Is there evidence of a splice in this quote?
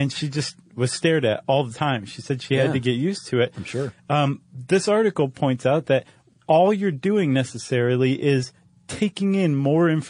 no; 0 cuts

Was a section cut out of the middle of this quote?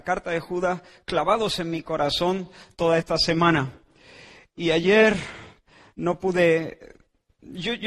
no; 0 cuts

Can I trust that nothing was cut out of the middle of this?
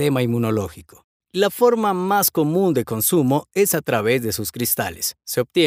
yes; 0 cuts

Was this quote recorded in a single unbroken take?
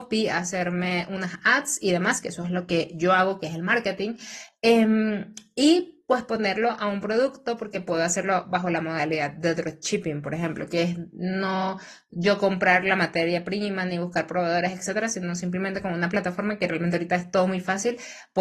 yes; 0 cuts

